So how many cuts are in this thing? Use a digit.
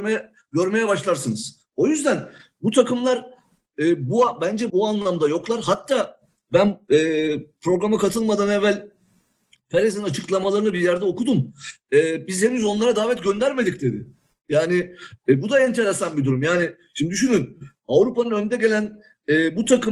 1